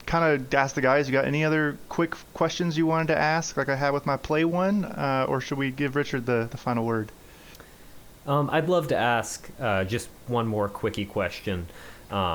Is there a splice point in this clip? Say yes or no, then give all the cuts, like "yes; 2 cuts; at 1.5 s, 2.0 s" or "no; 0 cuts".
no; 0 cuts